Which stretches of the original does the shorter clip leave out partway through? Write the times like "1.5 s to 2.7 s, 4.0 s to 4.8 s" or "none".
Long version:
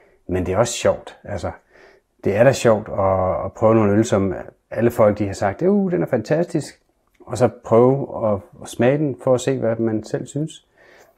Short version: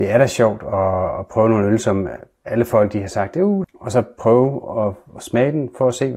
5.9 s to 7.1 s